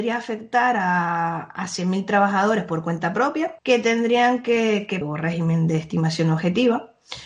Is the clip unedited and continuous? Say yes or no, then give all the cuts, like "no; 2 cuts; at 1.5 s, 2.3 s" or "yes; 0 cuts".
no; 2 cuts; at 3.6 s, 5.0 s